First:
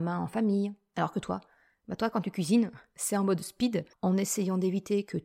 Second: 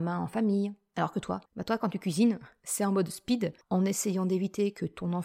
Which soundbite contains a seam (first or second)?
second